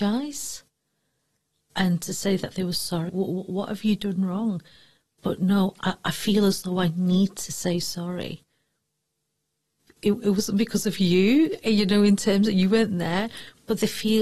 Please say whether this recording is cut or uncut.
cut